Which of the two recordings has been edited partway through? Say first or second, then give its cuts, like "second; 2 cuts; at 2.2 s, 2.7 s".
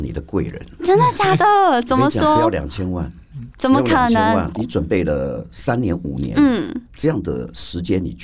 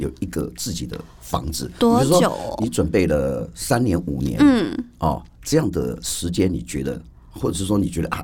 first; 2 cuts; at 4.5 s, 6.8 s